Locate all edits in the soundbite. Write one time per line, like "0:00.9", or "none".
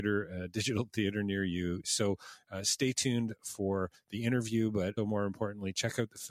0:01.8
0:05.0